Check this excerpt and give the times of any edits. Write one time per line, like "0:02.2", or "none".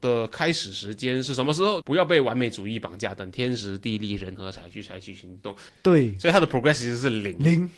0:01.8
0:05.7